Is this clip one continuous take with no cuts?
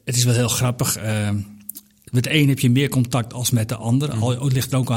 yes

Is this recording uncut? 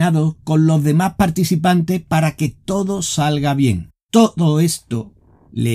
no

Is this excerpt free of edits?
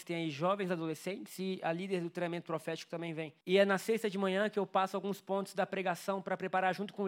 no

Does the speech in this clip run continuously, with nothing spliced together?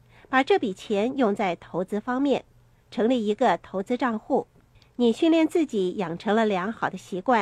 yes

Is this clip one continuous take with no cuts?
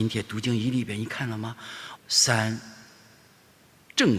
no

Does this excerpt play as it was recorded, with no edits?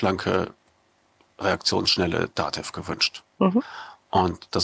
yes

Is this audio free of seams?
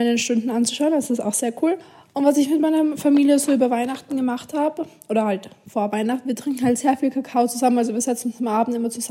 no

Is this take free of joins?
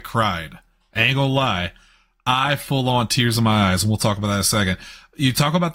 yes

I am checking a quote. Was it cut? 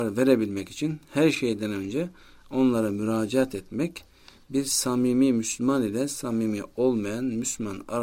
no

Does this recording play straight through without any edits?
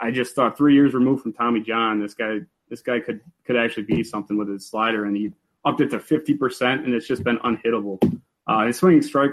yes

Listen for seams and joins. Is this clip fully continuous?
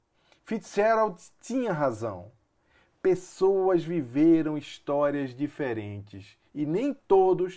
yes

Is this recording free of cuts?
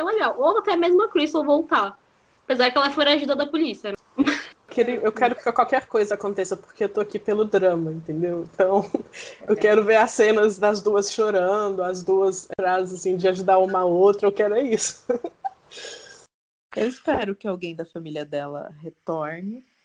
yes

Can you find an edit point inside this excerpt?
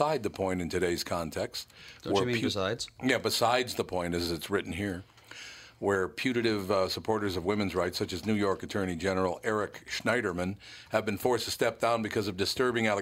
no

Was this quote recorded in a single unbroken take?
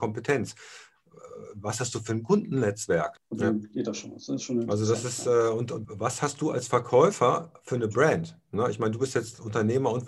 no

